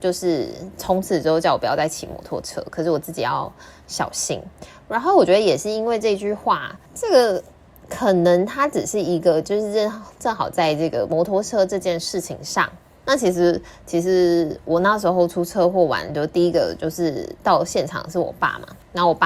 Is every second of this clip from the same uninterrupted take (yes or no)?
no